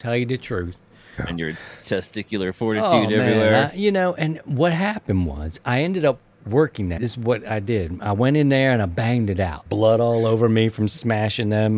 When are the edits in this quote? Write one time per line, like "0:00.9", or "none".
0:01.2
0:07.0
0:09.7